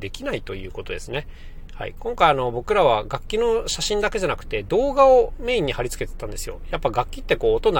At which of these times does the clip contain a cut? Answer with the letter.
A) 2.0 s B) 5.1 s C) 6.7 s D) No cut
A